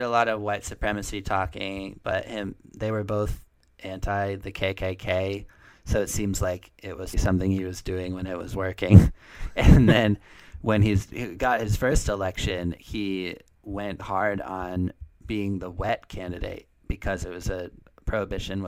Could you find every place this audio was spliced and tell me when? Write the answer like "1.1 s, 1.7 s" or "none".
7.1 s, 14.0 s